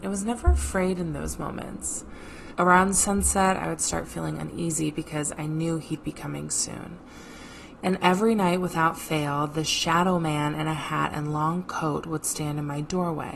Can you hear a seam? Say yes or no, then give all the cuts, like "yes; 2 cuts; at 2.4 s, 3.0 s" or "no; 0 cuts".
yes; 2 cuts; at 2.5 s, 7.8 s